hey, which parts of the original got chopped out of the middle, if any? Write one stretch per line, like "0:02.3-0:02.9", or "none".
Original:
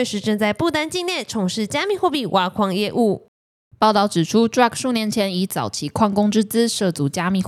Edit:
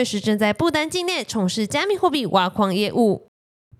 none